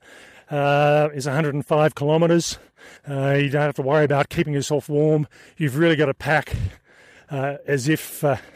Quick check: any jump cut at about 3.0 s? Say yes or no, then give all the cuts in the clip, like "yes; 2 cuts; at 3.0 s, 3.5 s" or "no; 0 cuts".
yes; 1 cut; at 3.0 s